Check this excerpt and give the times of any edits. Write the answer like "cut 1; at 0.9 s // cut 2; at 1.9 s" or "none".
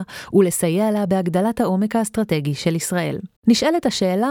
cut 1; at 3.4 s